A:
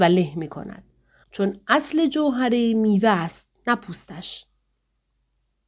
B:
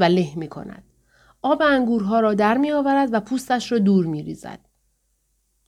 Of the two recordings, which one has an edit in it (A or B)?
A